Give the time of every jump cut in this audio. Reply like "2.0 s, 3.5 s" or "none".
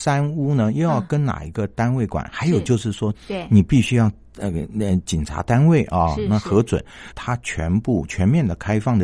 3.1 s, 7.1 s